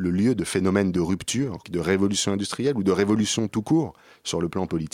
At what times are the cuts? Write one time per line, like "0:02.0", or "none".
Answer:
0:01.6